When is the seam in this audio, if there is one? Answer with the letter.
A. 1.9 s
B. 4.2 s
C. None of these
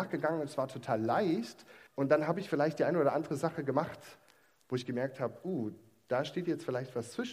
A